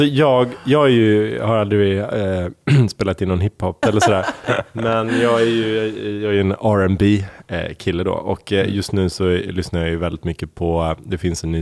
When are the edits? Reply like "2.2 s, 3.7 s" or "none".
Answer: 3.8 s